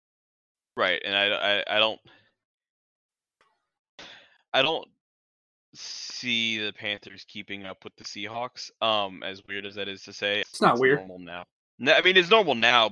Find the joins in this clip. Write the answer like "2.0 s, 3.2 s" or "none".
10.4 s